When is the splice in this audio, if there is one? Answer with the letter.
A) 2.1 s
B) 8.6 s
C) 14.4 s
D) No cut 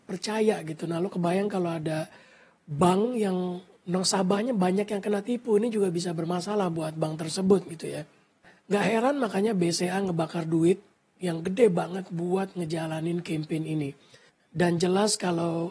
D